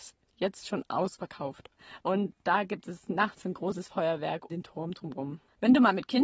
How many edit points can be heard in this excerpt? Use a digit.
2